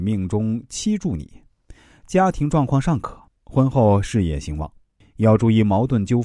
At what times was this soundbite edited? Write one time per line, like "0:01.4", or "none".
0:03.3
0:05.0